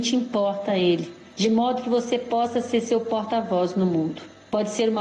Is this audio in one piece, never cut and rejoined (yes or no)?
yes